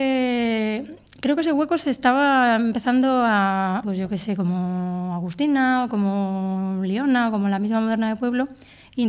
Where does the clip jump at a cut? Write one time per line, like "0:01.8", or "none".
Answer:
0:03.8